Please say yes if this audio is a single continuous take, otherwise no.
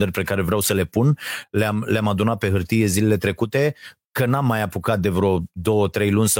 yes